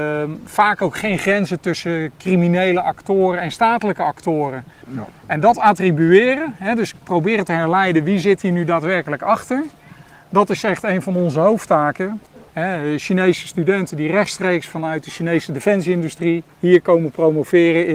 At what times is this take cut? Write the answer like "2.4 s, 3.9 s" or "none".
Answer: 4.8 s, 12.5 s, 16.5 s